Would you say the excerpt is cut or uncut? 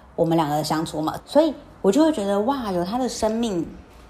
cut